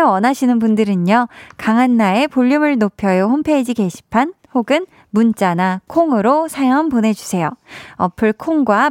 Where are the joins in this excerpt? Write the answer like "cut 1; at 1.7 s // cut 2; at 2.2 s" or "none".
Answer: none